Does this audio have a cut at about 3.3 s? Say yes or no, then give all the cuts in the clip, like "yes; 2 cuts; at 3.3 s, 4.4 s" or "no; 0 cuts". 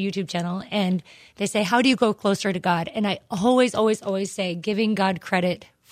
no; 0 cuts